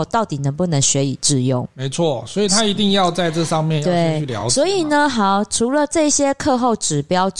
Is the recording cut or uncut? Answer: uncut